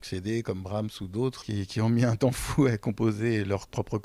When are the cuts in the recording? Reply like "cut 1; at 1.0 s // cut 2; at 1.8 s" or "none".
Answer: cut 1; at 1.4 s